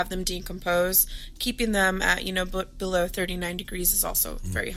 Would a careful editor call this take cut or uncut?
uncut